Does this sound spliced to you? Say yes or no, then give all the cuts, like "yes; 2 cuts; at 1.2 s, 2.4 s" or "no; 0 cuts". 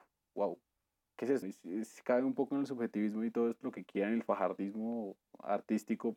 yes; 1 cut; at 1.4 s